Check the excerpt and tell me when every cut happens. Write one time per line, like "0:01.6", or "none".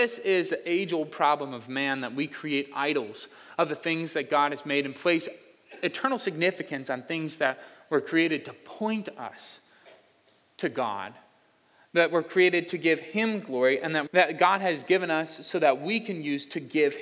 0:14.1